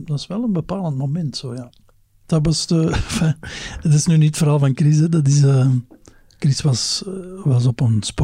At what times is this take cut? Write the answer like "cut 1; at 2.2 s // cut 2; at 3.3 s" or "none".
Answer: none